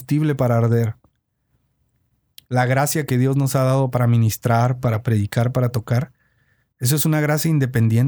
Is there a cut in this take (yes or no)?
no